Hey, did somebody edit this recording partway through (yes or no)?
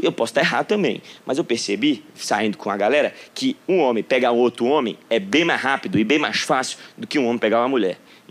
no